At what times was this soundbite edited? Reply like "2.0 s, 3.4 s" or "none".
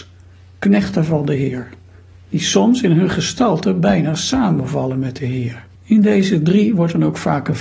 5.8 s